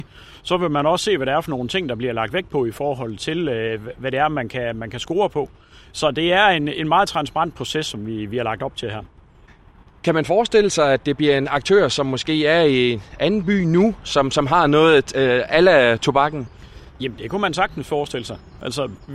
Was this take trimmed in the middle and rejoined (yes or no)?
no